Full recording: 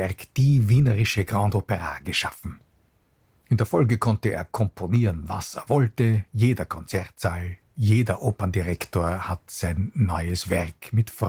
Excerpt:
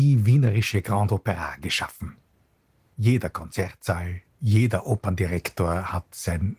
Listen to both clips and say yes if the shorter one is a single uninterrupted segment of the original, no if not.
no